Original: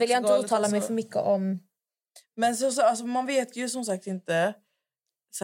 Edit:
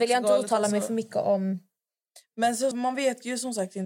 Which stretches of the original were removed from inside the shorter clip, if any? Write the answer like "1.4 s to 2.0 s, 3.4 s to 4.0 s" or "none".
2.7 s to 3.0 s